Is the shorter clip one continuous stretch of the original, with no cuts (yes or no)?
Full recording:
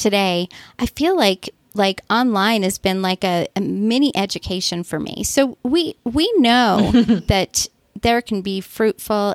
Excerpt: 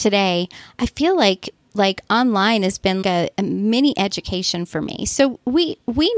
no